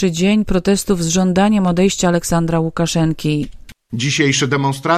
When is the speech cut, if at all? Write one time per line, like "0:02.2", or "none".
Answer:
none